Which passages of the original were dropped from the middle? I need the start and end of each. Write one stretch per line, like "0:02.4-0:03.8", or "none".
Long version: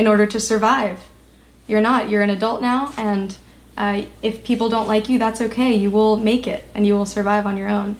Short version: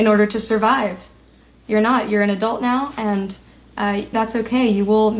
0:04.1-0:05.2